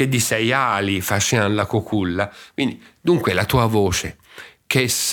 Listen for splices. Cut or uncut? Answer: uncut